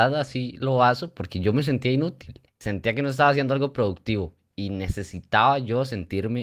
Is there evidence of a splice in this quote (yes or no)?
no